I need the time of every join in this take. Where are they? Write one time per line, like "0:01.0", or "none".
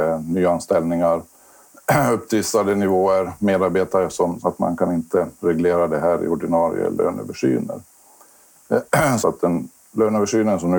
0:04.4
0:09.2